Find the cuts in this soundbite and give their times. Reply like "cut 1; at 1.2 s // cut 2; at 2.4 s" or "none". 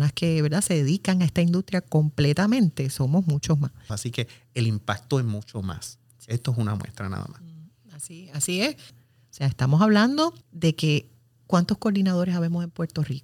cut 1; at 3.9 s // cut 2; at 8.9 s // cut 3; at 10.4 s

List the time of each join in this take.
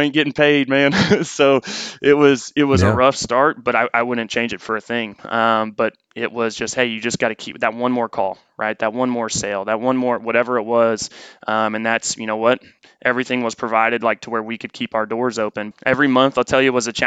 cut 1; at 5.2 s // cut 2; at 15.7 s

